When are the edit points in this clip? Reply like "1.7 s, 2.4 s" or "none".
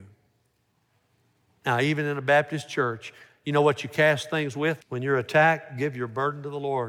4.8 s